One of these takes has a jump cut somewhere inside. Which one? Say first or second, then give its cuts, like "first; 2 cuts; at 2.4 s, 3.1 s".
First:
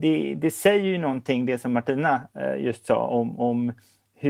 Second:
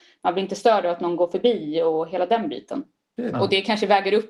second; 1 cut; at 3.3 s